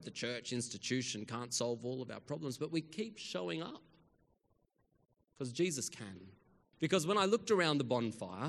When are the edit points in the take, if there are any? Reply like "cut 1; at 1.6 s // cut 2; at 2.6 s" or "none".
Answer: cut 1; at 6.7 s